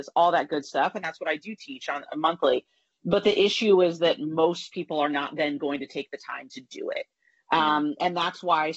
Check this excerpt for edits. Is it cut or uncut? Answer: uncut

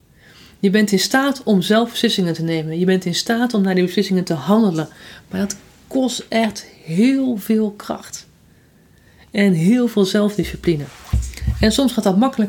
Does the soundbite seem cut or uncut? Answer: uncut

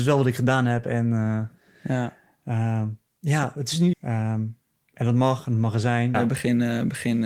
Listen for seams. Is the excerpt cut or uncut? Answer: cut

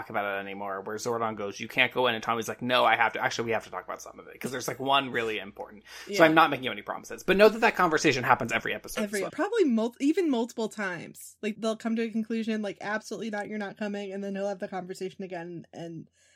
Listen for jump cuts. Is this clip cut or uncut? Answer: cut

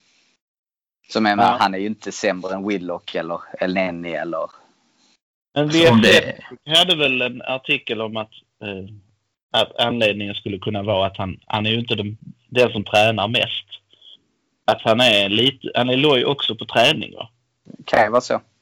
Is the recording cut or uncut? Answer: uncut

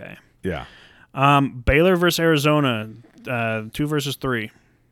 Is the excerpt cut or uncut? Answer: uncut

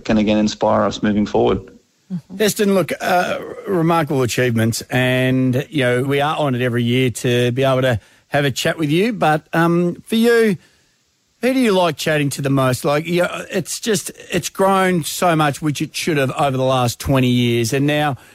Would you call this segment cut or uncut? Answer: cut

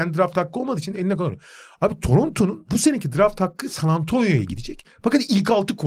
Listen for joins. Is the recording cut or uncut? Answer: uncut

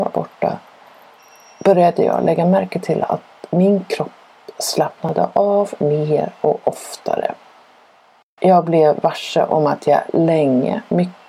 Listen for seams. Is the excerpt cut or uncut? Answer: uncut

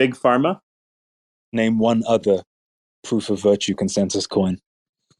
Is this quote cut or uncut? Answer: uncut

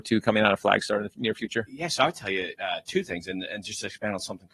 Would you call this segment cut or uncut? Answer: uncut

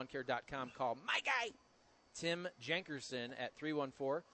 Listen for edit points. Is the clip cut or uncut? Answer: uncut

